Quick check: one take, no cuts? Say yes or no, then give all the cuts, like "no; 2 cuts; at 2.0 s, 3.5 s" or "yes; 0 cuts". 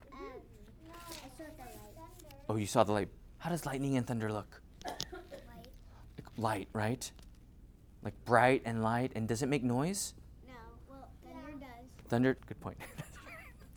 no; 2 cuts; at 3.3 s, 12.4 s